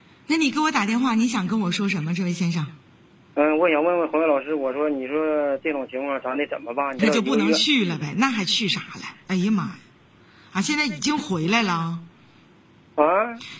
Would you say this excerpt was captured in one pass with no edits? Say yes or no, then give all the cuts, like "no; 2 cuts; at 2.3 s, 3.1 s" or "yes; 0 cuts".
no; 2 cuts; at 7.0 s, 9.2 s